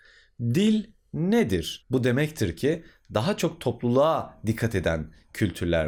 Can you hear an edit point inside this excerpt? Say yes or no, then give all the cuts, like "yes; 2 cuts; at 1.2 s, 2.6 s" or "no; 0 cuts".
yes; 1 cut; at 1.8 s